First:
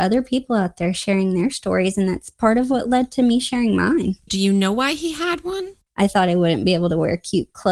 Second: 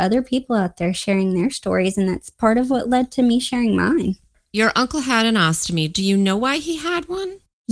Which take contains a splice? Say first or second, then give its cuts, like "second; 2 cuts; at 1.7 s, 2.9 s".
first; 2 cuts; at 4.3 s, 5.9 s